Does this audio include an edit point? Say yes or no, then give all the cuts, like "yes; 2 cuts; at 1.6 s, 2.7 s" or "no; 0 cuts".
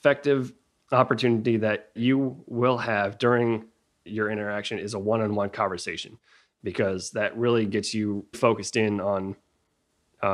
yes; 1 cut; at 8.3 s